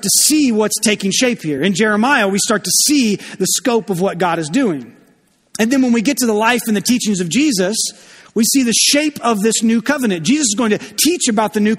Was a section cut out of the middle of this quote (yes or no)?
no